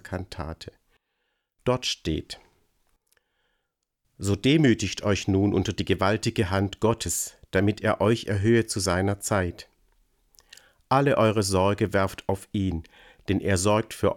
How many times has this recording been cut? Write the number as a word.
zero